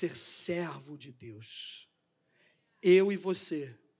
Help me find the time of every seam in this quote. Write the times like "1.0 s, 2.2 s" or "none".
none